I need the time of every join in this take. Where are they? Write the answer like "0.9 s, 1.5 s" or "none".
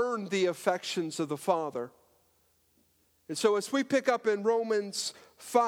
none